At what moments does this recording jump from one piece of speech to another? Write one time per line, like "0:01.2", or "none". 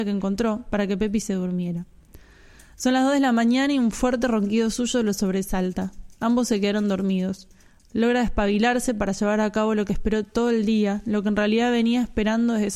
none